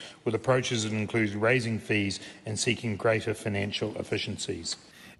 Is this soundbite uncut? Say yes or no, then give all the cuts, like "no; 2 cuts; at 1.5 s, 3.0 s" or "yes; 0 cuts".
yes; 0 cuts